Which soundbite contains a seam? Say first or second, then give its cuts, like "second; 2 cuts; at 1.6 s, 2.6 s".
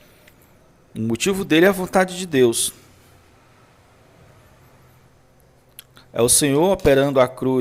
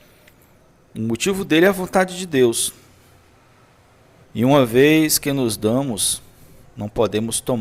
second; 1 cut; at 4.2 s